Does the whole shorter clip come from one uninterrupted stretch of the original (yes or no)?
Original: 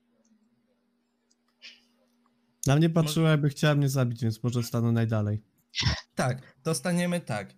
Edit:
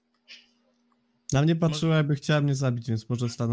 yes